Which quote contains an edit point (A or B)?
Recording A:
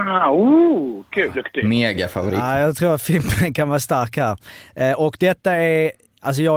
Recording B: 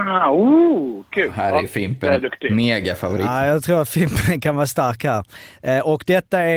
A